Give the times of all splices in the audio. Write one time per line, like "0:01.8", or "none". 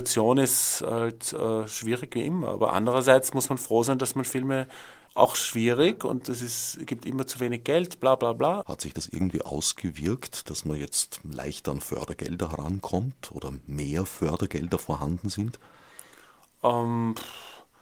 0:05.1
0:08.6
0:10.5